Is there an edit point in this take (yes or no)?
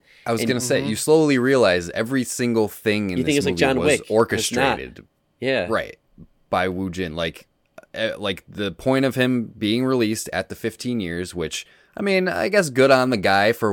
no